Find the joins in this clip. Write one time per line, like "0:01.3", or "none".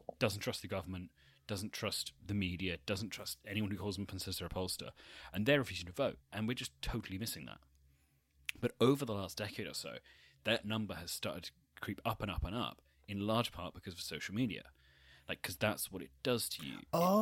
none